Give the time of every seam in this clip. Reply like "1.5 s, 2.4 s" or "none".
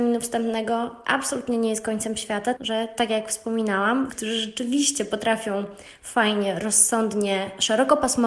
2.6 s, 4.1 s

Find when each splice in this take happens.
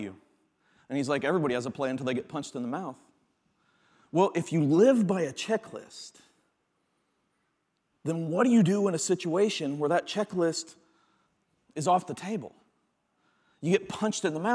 none

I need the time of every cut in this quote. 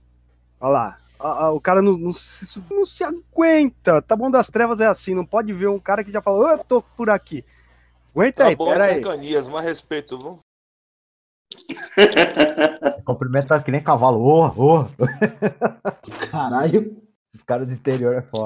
2.7 s

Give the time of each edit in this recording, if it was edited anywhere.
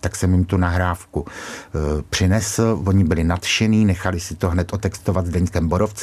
none

